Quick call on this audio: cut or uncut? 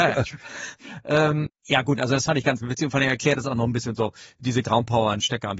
cut